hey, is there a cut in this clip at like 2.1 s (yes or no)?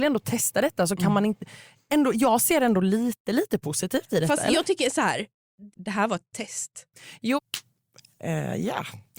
no